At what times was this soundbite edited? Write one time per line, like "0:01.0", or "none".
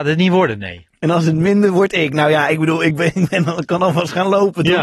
0:01.0